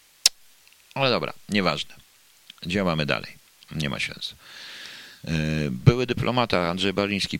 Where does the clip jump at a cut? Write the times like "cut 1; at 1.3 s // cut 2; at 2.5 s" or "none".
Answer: none